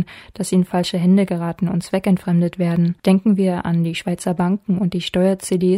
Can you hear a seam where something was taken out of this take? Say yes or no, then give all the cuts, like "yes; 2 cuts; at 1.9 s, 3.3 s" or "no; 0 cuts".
yes; 1 cut; at 3.0 s